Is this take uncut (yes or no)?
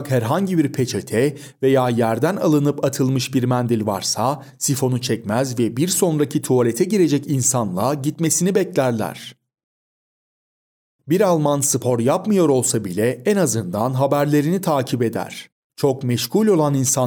no